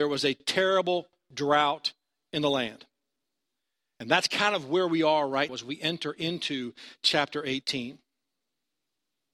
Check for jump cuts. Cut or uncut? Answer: cut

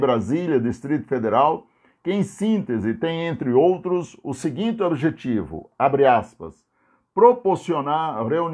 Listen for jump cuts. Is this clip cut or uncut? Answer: uncut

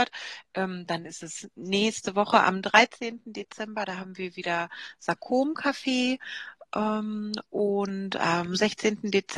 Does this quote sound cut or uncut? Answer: uncut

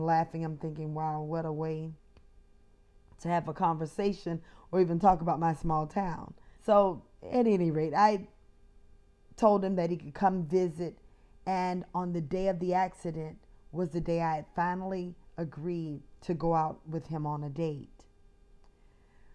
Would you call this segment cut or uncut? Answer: cut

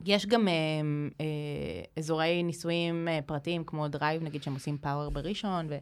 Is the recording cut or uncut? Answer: cut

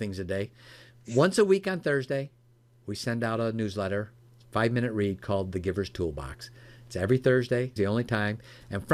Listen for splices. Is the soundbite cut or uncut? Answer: cut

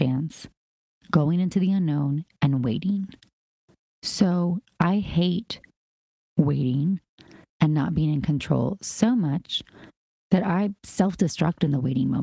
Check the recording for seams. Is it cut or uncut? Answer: uncut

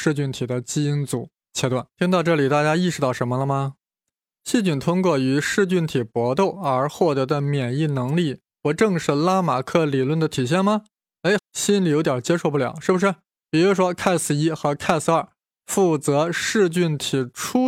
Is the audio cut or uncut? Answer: cut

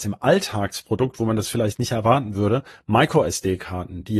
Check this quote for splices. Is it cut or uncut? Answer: uncut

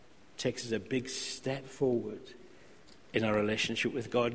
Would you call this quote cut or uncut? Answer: uncut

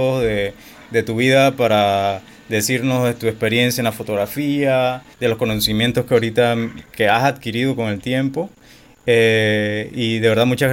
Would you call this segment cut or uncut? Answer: cut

